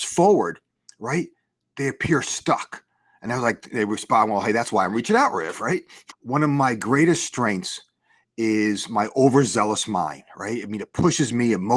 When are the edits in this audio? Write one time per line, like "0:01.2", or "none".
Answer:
0:06.1